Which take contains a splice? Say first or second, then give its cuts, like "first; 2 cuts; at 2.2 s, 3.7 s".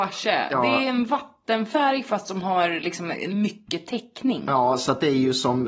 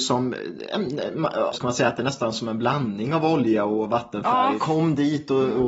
second; 2 cuts; at 1.5 s, 4.6 s